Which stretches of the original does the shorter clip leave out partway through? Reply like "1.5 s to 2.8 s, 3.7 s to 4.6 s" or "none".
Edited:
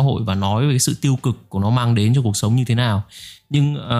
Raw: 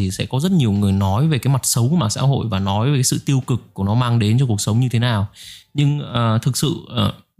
none